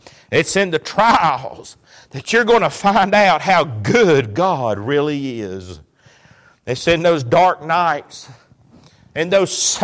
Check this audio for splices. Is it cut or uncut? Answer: uncut